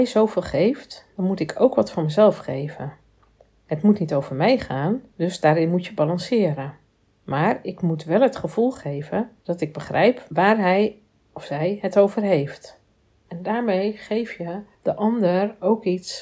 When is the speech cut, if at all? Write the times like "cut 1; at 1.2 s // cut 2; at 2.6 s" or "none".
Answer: cut 1; at 9.4 s // cut 2; at 13.2 s